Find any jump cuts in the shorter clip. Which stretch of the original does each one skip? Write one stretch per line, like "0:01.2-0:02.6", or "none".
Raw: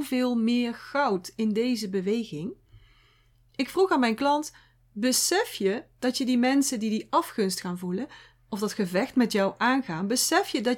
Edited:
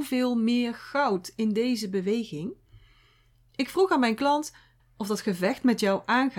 0:04.8-0:08.3